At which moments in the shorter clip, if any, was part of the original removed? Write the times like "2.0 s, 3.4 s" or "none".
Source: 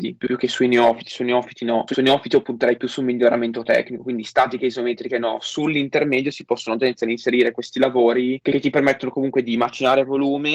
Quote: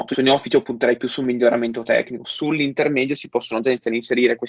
2.2 s